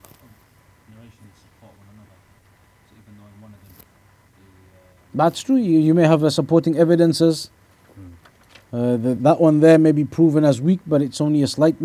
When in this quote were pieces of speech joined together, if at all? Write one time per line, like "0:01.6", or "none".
0:09.2